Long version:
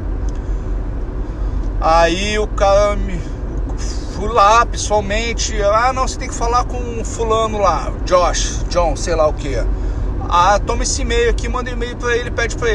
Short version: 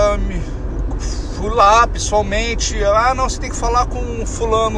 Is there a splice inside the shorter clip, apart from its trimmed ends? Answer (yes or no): no